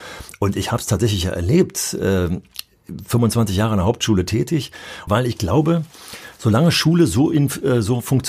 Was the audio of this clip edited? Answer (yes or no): yes